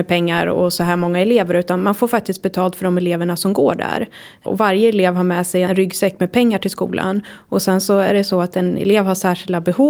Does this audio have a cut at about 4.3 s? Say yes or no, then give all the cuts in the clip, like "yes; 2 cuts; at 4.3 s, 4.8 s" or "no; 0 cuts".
no; 1 cut; at 5.6 s